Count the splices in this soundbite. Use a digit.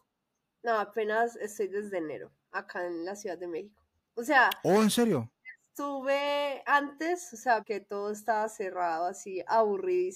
1